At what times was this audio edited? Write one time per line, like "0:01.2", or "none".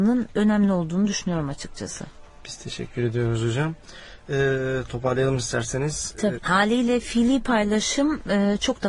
0:06.3